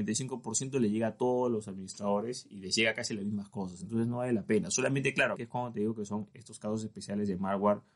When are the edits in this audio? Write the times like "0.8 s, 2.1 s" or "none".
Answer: 5.3 s